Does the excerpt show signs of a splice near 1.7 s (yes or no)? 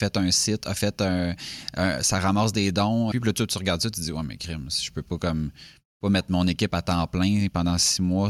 no